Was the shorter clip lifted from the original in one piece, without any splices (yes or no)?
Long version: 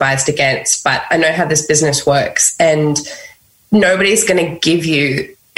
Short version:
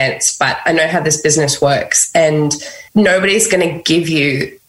no